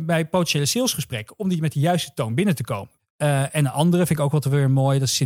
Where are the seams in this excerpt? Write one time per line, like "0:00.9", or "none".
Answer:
0:03.0